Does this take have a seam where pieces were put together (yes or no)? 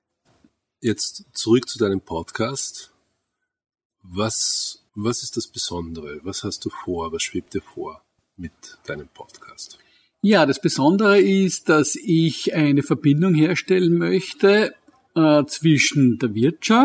yes